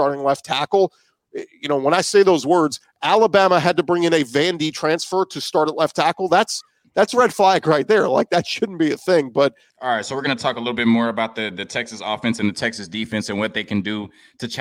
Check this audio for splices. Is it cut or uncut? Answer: cut